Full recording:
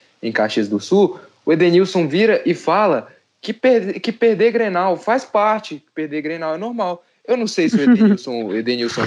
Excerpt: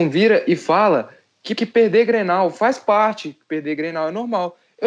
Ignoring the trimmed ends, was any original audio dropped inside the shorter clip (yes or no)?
yes